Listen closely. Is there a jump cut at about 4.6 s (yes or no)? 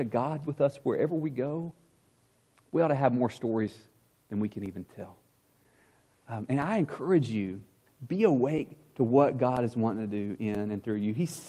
no